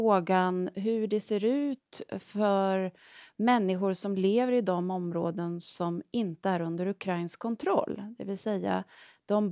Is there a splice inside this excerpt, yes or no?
no